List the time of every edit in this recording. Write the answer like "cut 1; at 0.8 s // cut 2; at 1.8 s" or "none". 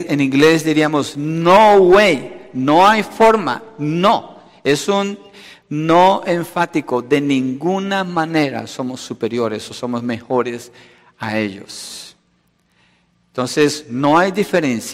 none